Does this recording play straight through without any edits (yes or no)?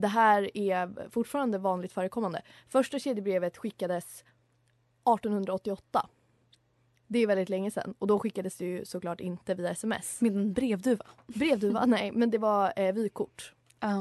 yes